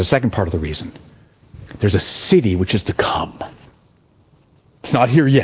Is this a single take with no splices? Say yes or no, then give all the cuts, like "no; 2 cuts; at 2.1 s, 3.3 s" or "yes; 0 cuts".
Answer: yes; 0 cuts